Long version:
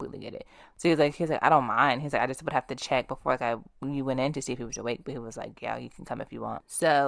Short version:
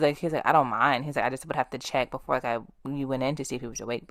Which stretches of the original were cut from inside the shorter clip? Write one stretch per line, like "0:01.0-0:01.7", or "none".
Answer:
none